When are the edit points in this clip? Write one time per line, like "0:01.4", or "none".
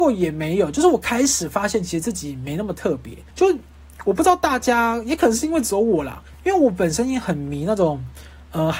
0:03.3